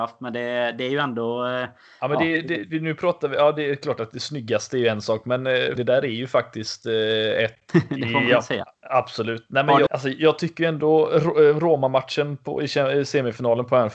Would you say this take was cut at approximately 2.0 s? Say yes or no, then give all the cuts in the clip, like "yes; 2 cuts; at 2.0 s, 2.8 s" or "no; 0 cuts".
no; 3 cuts; at 5.8 s, 7.7 s, 9.9 s